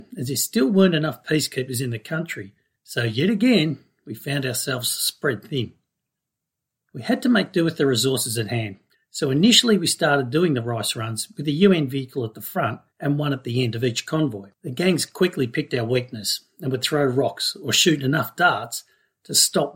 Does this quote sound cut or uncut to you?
cut